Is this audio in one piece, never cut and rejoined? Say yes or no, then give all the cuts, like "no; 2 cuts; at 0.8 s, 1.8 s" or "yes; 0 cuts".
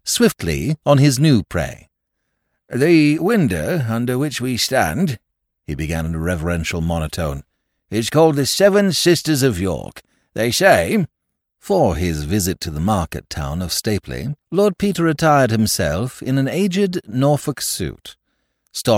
no; 2 cuts; at 11.4 s, 14.4 s